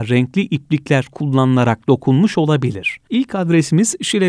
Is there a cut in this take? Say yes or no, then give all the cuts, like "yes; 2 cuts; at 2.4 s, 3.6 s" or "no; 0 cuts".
yes; 1 cut; at 3.1 s